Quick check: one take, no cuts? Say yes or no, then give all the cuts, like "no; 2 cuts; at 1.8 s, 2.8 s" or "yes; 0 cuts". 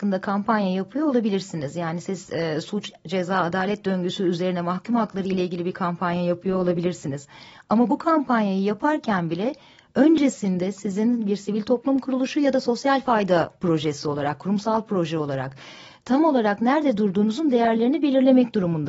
yes; 0 cuts